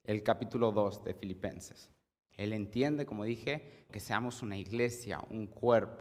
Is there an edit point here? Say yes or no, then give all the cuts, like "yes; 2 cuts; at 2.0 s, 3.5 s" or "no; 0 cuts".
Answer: yes; 2 cuts; at 2.2 s, 3.9 s